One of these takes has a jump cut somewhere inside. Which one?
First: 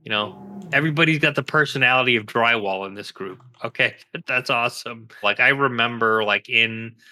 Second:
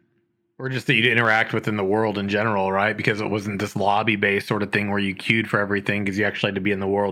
first; 1 cut; at 5.2 s

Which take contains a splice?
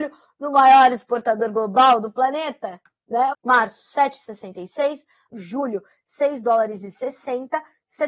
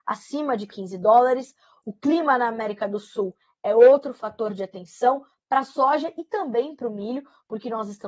first; 2 cuts; at 3.3 s, 5.3 s

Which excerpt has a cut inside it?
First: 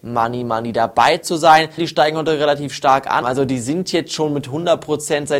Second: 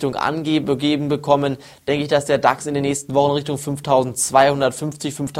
first; 2 cuts; at 1.8 s, 3.2 s

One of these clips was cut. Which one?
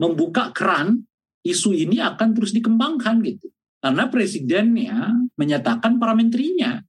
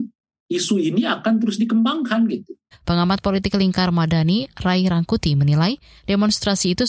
second; 1 cut; at 2.7 s

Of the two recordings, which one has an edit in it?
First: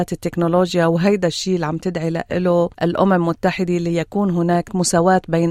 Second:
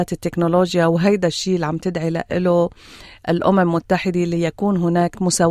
first; 1 cut; at 2.7 s

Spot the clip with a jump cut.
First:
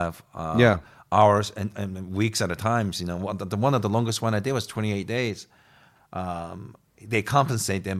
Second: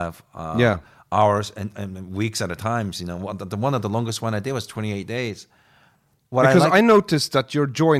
first; 1 cut; at 5.9 s

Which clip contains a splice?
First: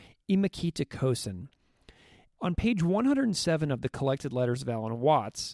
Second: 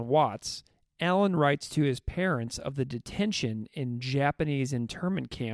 first; 1 cut; at 2.3 s

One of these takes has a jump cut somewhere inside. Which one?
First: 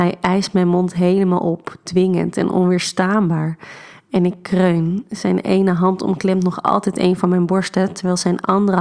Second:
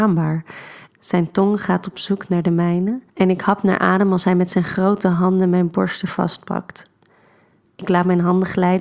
second; 2 cuts; at 0.9 s, 3.1 s

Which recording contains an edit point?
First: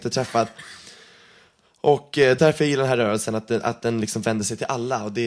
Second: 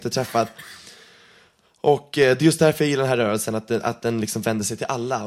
first; 1 cut; at 2.4 s

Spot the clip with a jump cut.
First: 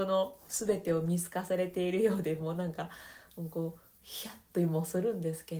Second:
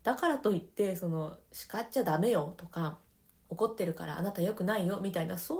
second; 1 cut; at 3.5 s

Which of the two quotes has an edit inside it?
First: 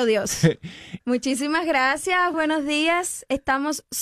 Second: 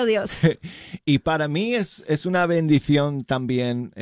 first; 2 cuts; at 1.0 s, 2.3 s

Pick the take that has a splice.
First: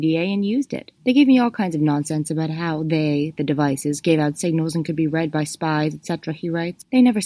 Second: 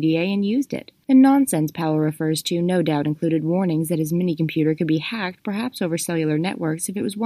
first; 1 cut; at 1.0 s

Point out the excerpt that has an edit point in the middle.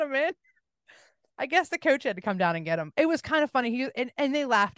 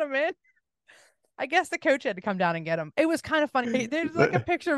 second; 1 cut; at 3.6 s

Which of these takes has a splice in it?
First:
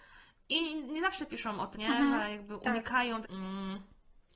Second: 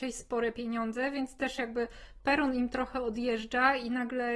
first; 2 cuts; at 1.7 s, 3.2 s

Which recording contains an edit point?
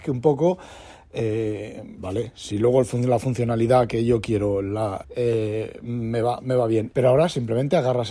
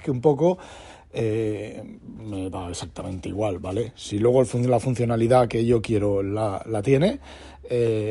first; 3 cuts; at 2.0 s, 5.0 s, 6.9 s

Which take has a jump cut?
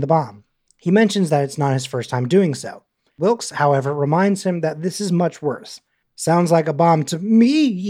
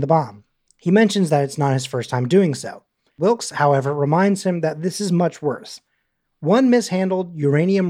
first; 1 cut; at 6.0 s

